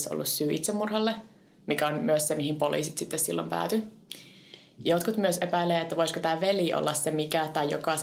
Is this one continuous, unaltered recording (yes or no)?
yes